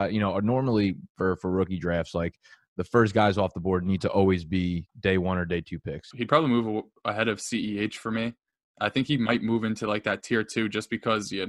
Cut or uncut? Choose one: cut